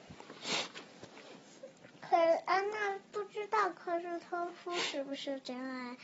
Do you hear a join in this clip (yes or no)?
no